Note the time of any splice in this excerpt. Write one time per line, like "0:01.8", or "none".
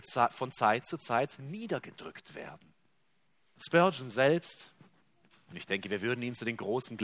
0:03.6